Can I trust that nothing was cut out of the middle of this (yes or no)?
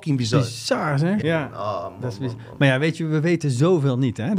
no